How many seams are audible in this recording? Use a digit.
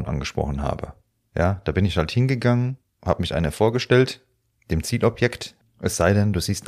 2